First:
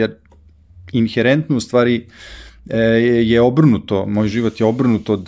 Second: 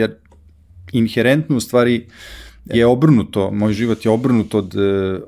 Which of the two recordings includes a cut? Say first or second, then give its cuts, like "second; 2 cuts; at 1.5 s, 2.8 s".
second; 1 cut; at 2.7 s